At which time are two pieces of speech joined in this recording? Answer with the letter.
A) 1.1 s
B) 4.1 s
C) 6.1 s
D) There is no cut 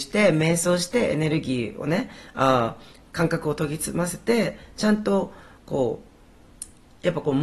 D